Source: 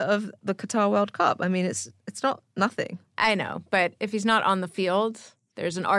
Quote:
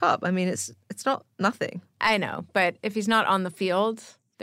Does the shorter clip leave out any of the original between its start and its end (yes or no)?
no